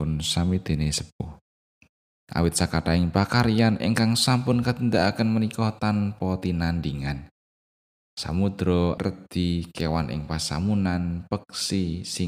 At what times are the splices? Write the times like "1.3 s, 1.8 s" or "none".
2.1 s, 9.0 s